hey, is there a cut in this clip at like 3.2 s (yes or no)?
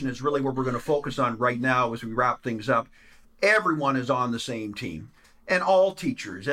yes